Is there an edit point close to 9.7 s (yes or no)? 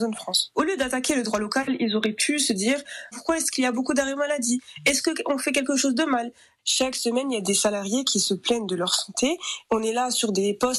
no